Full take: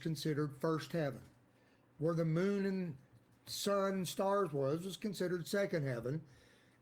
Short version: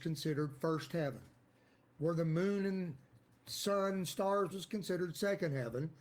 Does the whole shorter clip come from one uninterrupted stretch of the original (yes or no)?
no